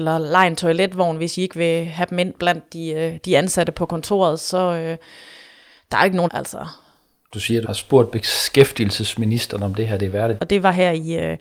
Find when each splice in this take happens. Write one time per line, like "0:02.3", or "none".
0:06.3
0:07.6
0:10.4